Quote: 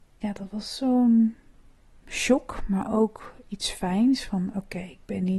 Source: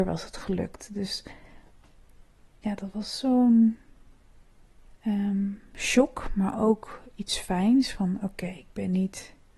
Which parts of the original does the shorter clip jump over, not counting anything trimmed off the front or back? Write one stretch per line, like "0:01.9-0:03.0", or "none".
0:04.4-0:05.7